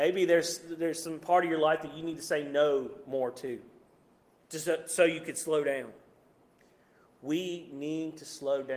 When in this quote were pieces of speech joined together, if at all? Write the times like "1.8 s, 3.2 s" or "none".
none